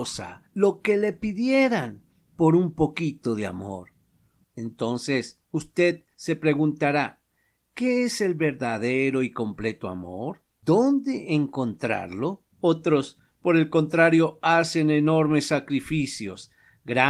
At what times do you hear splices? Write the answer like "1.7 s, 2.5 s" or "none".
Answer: 4.4 s, 12.5 s